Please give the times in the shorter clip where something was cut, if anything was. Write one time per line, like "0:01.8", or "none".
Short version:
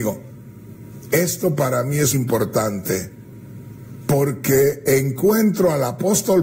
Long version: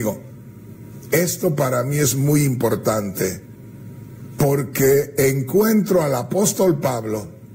0:02.1